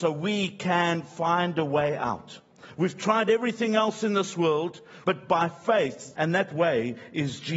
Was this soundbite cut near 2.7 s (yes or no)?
no